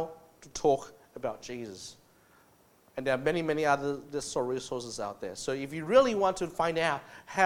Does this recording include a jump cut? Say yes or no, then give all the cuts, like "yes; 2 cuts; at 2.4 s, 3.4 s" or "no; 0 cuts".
no; 0 cuts